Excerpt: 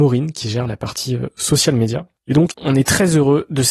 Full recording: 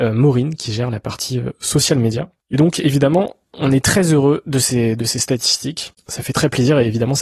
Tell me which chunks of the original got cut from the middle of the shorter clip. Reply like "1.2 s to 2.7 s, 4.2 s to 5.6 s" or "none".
2.7 s to 3.5 s